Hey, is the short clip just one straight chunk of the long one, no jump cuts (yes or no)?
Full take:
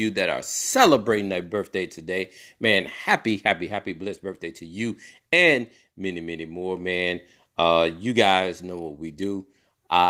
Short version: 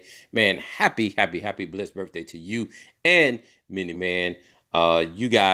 no